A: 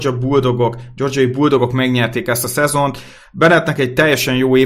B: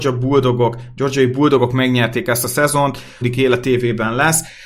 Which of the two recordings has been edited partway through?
B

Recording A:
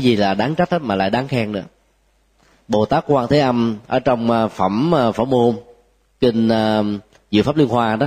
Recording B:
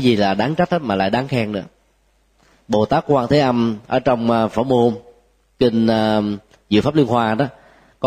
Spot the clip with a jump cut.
B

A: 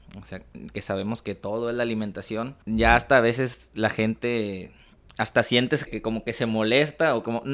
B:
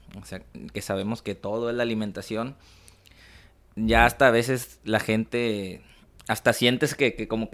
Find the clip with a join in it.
A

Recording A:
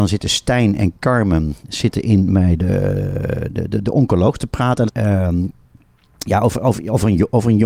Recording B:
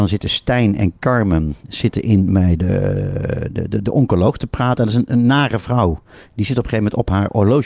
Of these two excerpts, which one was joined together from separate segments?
A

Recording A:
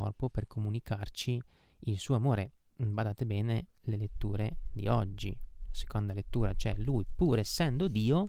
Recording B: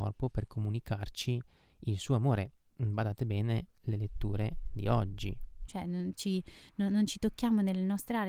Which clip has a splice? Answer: B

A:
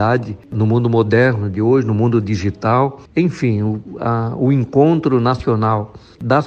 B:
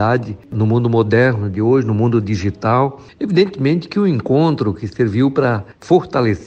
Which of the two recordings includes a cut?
A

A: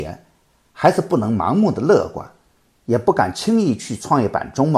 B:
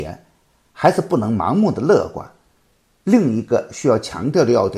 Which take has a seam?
A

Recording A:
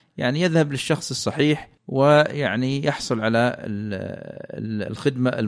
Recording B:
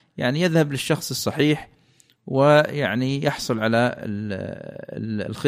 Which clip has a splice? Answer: A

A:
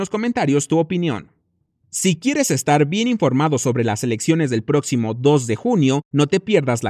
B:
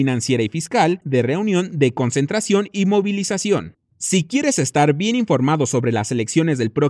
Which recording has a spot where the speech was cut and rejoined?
B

